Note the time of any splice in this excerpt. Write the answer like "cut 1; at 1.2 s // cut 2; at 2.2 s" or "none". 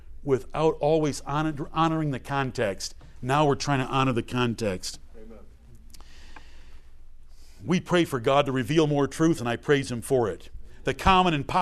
cut 1; at 9.4 s